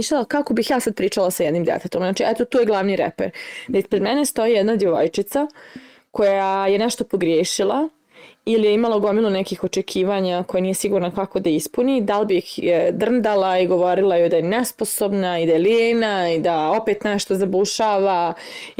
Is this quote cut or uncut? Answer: uncut